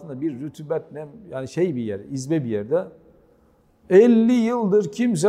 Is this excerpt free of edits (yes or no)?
yes